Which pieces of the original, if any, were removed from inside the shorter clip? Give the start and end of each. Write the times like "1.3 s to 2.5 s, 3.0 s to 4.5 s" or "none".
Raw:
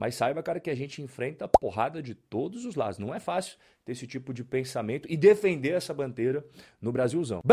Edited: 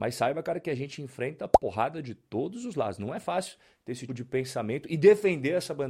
4.1 s to 4.3 s